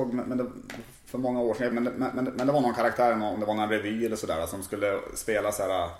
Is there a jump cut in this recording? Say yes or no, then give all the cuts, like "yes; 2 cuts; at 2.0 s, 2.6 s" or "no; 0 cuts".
yes; 1 cut; at 1.7 s